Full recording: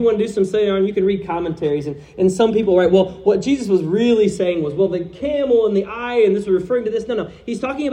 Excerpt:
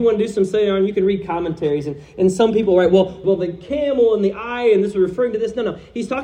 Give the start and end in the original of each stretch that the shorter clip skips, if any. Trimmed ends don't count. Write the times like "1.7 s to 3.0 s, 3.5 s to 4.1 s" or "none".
3.2 s to 4.8 s